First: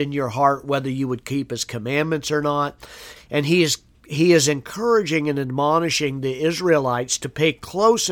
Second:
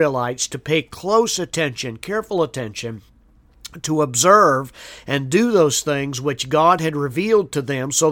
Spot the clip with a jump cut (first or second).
first